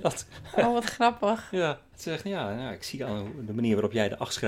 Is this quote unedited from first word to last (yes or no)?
yes